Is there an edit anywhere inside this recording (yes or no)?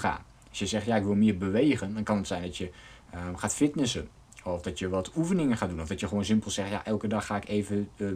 no